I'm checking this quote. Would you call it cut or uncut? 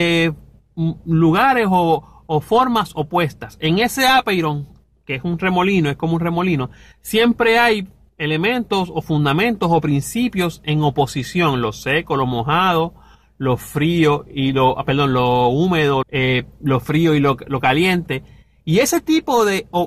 cut